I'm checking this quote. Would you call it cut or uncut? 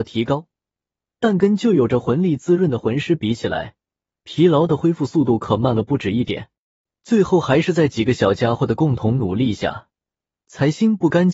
uncut